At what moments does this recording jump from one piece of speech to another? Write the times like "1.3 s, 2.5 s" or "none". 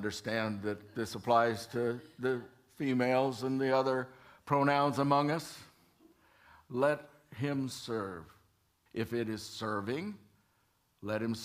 8.9 s